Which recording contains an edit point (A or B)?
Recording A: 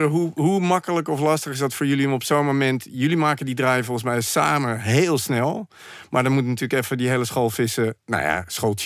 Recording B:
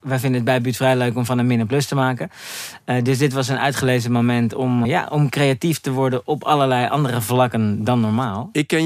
B